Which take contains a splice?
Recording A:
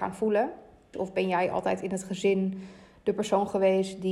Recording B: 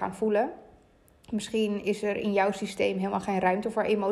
A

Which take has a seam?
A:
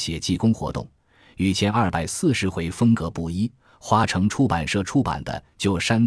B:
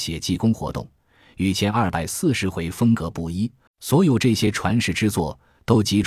B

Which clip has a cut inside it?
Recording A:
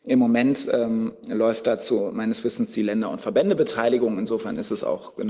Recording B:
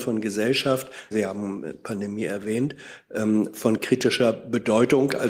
B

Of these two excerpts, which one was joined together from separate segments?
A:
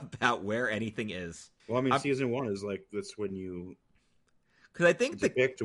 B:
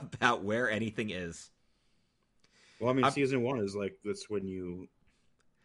A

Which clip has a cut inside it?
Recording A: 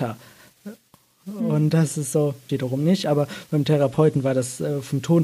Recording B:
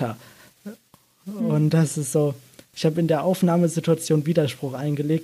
A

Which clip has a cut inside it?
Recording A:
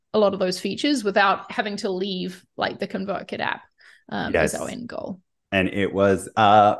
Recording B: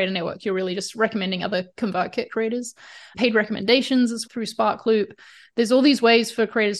B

